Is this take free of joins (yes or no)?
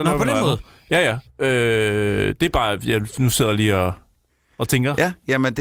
no